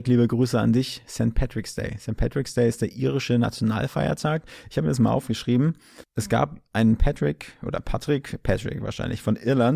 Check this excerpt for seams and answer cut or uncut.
uncut